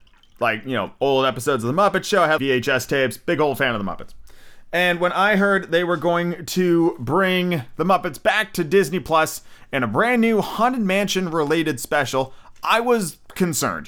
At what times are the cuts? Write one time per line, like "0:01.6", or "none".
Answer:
0:02.4